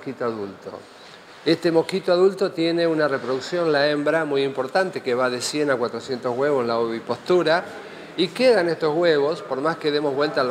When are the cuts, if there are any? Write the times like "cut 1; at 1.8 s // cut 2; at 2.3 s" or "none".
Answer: none